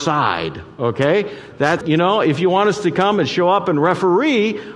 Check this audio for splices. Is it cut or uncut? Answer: cut